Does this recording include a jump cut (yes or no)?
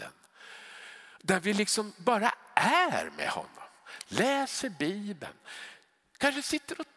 no